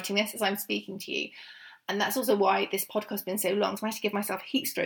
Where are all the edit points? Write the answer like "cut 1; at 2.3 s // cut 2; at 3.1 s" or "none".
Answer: none